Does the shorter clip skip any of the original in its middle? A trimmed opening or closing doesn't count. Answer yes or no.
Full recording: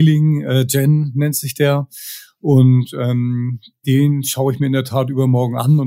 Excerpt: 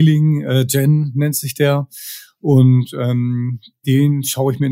no